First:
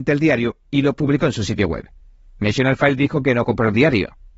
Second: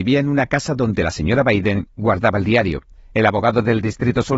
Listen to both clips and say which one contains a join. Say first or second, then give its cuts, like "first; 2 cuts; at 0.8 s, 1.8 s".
second; 1 cut; at 2.9 s